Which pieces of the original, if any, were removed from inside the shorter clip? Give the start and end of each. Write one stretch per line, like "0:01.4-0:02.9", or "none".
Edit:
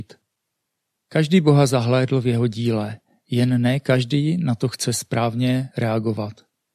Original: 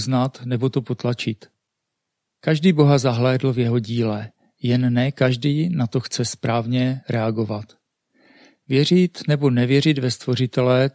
none

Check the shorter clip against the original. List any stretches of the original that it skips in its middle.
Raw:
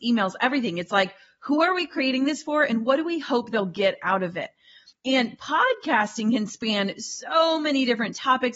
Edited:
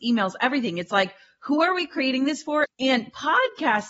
0:02.6-0:04.9

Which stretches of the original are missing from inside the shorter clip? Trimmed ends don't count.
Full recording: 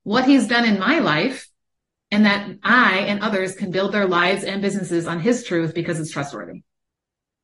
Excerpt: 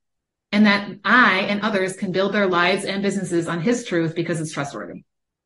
none

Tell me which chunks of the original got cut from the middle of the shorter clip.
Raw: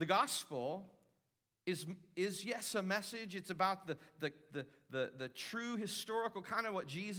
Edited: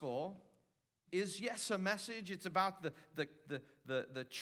0:01.5-0:02.1

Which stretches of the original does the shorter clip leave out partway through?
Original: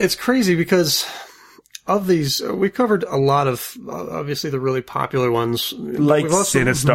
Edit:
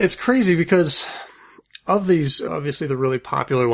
0:02.5-0:04.1

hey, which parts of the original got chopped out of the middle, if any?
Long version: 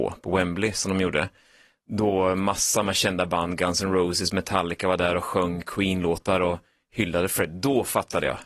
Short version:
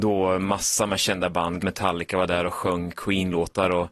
0:03.6-0:04.3

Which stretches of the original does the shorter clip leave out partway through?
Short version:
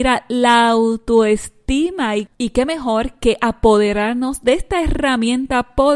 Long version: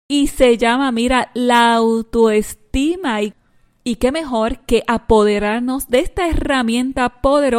0:03.4-0:03.8

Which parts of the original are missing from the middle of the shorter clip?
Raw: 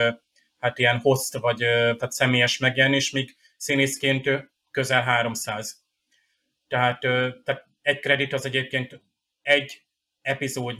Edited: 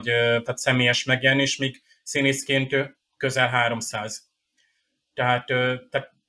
none

